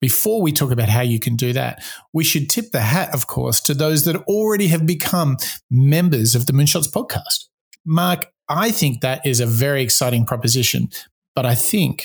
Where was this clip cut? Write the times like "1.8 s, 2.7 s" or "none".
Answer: 7.8 s